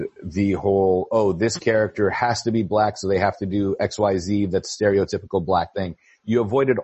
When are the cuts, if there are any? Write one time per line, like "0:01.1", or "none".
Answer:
0:05.7